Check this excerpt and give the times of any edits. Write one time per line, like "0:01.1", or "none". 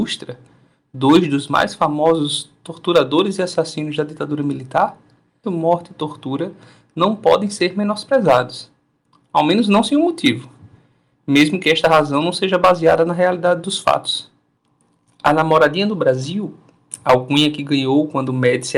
0:05.4